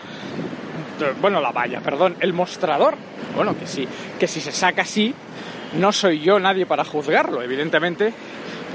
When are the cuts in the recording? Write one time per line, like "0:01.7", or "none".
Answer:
none